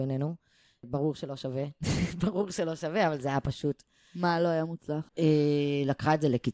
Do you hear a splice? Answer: yes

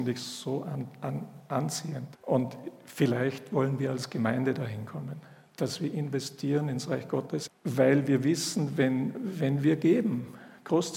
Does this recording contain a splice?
yes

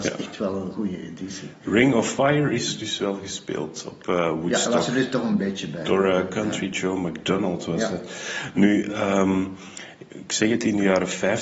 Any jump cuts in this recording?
no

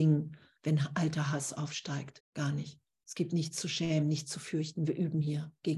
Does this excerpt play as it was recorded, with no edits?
no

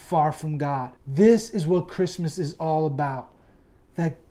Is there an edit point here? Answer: yes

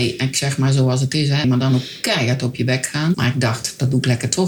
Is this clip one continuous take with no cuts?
no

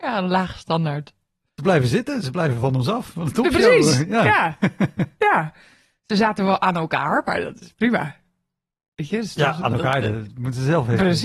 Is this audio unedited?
yes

